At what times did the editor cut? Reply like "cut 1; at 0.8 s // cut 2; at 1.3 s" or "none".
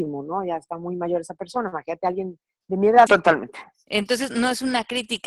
cut 1; at 3.1 s